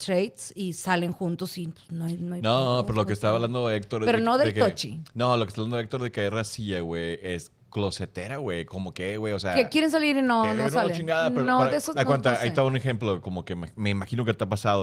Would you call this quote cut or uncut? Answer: uncut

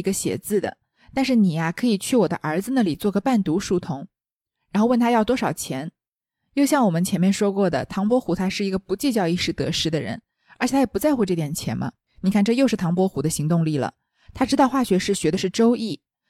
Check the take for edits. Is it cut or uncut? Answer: cut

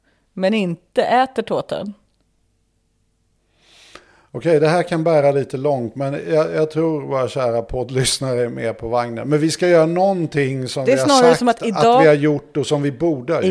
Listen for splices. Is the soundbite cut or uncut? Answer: uncut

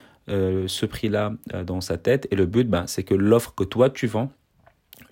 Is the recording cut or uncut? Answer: uncut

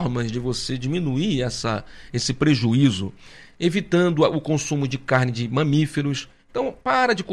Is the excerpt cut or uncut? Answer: uncut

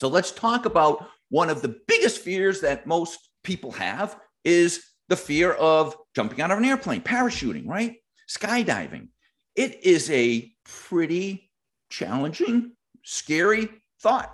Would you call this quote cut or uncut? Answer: uncut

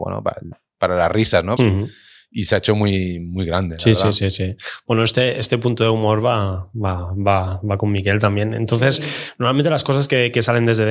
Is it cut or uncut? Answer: cut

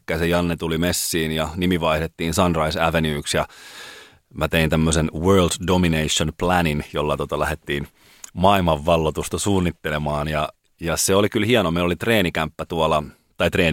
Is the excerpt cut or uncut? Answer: uncut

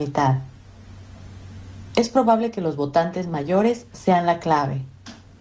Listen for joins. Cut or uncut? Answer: uncut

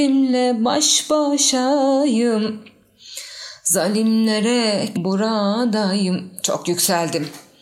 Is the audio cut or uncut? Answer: cut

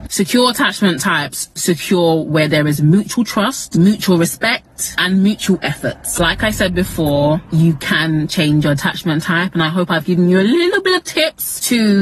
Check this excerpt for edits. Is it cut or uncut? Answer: uncut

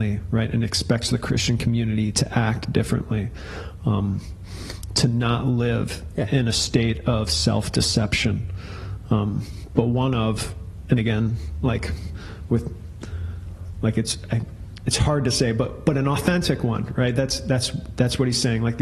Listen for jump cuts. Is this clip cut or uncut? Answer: uncut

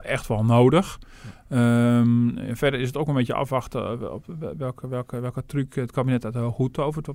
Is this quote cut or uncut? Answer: uncut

